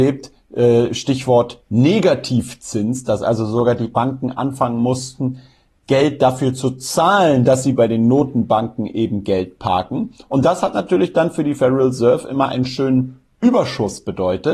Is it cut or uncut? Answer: uncut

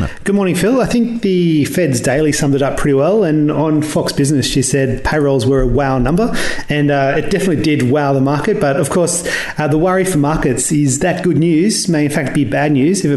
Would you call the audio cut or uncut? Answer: uncut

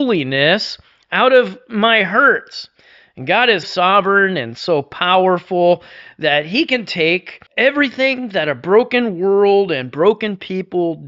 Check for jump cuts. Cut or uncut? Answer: cut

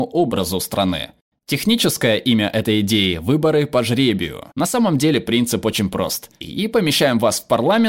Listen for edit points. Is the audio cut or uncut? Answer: cut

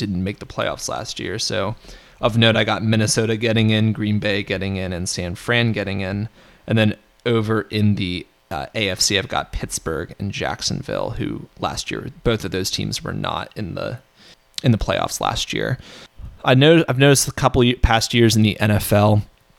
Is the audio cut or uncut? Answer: uncut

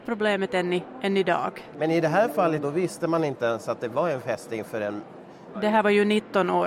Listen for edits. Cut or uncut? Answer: cut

